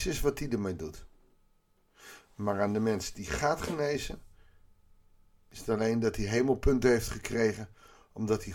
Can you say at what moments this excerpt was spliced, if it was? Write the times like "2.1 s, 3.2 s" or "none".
none

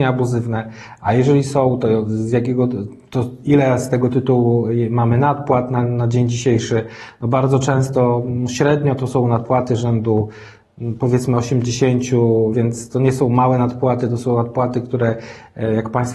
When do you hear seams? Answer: 12.5 s

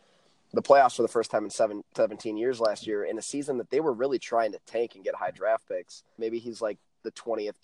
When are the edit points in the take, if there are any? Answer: 6.2 s

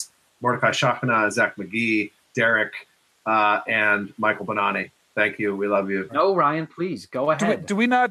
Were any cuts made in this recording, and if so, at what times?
6.1 s

